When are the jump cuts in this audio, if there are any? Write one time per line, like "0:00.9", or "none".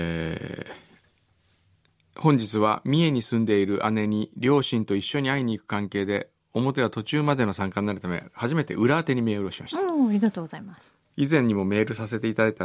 none